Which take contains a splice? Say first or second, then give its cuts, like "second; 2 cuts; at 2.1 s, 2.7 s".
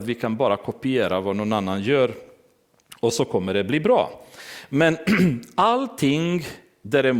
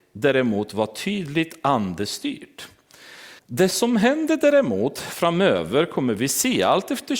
second; 1 cut; at 3.4 s